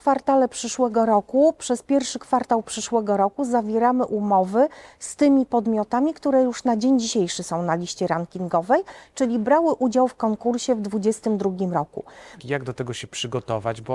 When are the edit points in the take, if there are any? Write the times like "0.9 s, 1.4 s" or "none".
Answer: 12.4 s